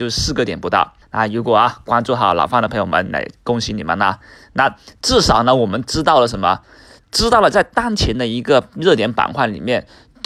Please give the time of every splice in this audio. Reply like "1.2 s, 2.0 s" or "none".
1.0 s